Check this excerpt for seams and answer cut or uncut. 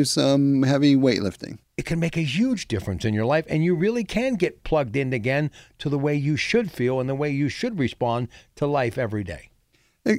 cut